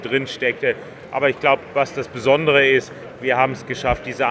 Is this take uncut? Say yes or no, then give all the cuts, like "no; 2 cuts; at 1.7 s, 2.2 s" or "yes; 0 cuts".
yes; 0 cuts